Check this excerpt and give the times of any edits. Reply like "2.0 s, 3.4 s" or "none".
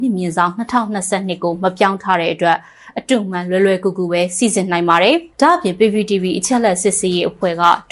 5.3 s